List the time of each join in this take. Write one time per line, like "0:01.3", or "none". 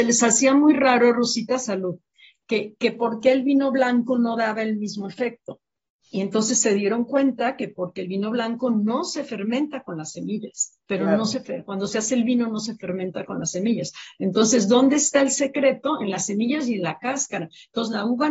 0:10.8